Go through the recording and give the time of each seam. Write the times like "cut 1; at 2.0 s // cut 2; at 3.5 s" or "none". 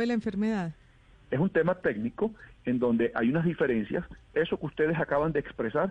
cut 1; at 1.1 s // cut 2; at 4.3 s